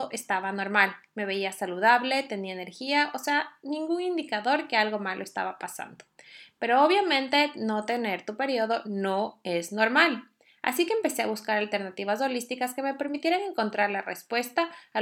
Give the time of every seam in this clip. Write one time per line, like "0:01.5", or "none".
none